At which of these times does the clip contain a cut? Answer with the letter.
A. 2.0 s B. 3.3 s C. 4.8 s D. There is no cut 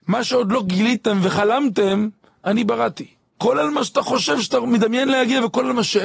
B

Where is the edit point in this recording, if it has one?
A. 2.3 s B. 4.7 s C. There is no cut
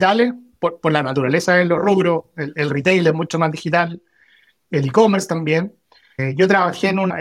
C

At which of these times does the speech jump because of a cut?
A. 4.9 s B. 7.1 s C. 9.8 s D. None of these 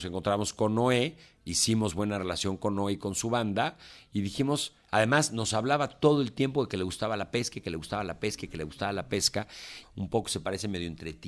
C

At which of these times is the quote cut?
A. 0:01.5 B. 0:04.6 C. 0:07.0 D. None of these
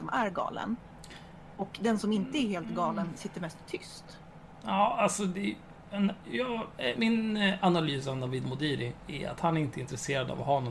C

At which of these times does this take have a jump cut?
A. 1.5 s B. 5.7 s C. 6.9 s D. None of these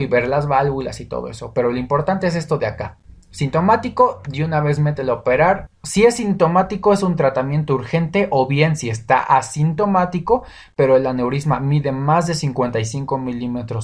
B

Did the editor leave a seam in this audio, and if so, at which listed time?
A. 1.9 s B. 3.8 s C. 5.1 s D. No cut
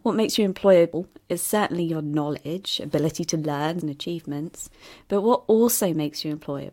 B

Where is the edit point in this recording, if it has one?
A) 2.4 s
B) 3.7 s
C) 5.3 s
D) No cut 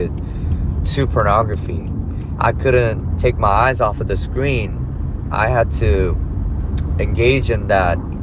A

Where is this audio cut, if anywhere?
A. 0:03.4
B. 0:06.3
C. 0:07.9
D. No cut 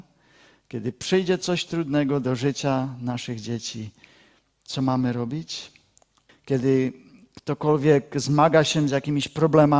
B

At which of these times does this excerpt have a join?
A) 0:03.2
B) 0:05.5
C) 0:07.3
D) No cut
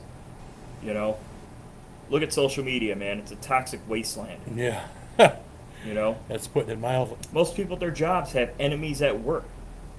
C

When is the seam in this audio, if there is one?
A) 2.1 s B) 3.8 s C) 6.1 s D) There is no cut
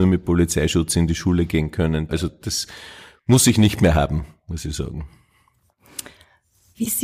A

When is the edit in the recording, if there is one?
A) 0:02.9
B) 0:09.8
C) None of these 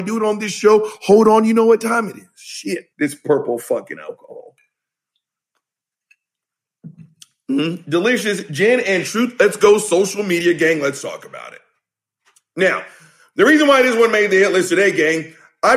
A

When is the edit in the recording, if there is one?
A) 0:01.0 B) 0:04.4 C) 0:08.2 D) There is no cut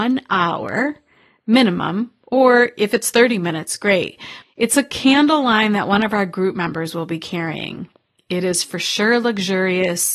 B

